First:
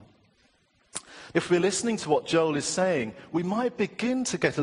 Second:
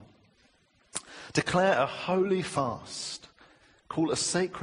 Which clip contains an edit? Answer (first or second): first